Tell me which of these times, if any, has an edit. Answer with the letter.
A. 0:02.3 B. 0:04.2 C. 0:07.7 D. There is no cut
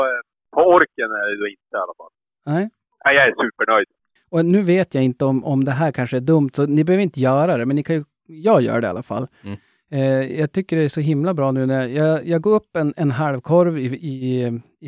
B